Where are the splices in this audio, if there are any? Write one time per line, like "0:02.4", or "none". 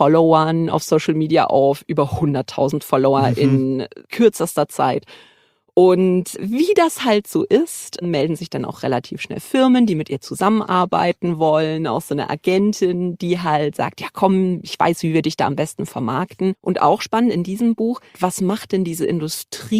0:16.5
0:18.1